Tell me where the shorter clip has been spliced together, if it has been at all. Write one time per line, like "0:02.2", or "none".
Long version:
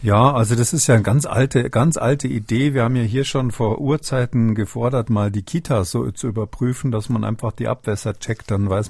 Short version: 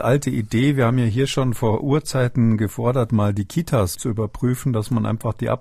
0:03.9